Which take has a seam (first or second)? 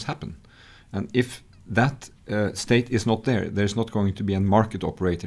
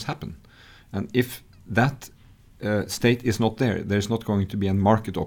first